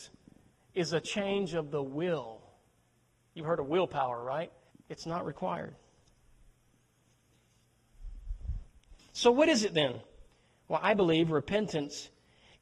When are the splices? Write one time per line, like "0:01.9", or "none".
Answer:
0:04.7
0:09.0